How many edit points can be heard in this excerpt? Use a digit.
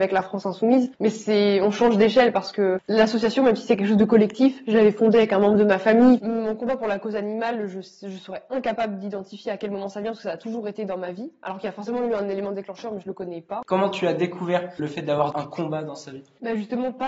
2